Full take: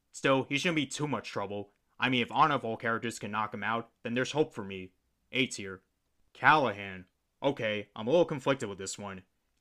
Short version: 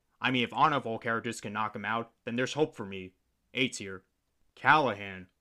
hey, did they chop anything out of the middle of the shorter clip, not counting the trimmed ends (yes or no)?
no